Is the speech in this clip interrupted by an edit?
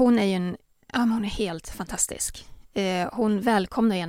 no; 0 cuts

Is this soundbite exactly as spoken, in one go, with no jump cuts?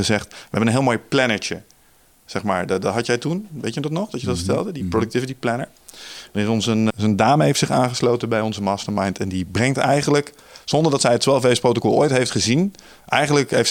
no; 1 cut; at 6.9 s

